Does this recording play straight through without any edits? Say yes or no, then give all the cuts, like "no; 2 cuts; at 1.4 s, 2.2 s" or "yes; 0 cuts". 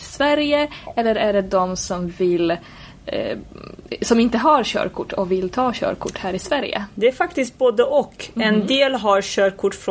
yes; 0 cuts